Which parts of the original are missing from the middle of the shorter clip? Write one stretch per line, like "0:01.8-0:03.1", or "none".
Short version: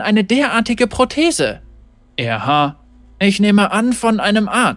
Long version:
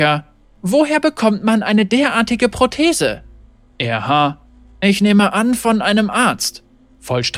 none